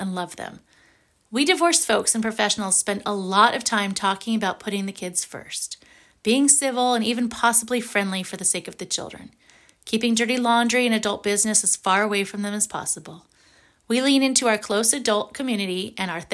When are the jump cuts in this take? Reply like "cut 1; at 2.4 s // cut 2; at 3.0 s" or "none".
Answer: none